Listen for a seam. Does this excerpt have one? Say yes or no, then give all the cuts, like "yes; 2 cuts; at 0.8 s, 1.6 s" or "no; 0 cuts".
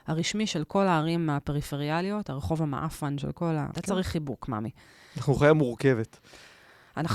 yes; 1 cut; at 3.7 s